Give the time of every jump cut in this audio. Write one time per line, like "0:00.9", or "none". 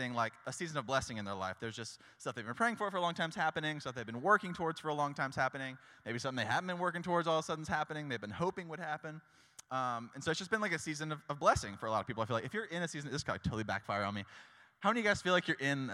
none

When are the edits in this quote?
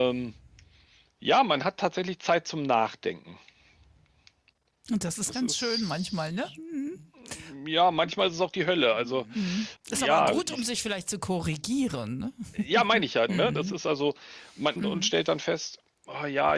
0:13.3
0:14.8

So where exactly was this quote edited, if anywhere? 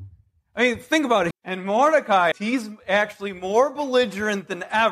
0:01.3
0:02.3

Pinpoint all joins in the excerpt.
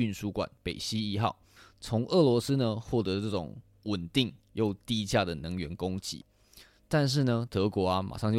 0:07.5

